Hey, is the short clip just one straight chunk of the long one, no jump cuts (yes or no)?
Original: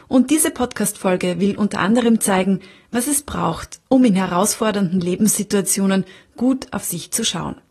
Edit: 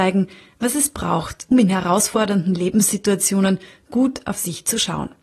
no